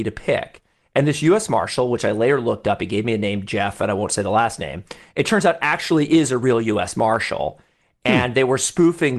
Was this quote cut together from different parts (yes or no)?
no